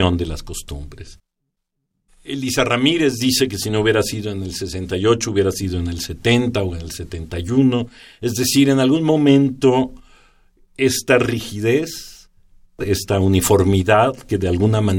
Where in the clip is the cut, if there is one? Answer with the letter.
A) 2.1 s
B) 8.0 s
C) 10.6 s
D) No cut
A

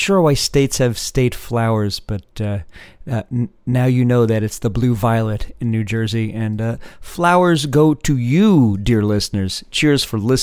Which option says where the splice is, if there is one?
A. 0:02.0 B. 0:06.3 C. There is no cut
C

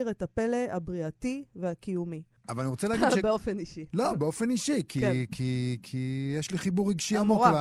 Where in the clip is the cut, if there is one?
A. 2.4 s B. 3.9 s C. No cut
A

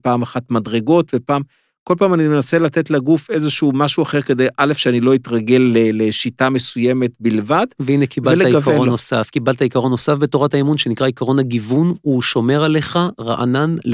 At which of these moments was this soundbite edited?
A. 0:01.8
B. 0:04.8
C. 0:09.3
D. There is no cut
D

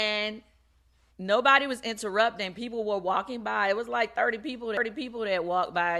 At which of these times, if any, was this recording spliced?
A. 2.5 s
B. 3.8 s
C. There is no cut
C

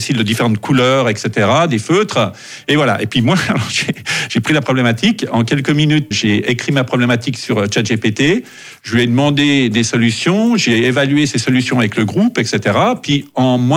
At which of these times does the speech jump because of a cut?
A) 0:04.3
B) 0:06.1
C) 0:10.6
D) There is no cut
B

